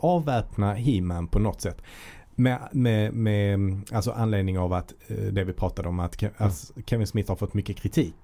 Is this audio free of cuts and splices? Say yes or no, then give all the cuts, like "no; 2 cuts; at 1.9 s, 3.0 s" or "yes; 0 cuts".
yes; 0 cuts